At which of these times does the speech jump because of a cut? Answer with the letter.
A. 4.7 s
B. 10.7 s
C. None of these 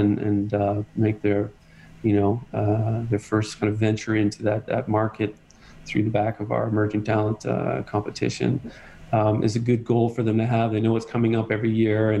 C